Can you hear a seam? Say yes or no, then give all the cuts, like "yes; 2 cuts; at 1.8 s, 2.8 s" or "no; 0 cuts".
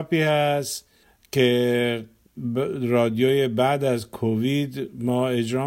no; 0 cuts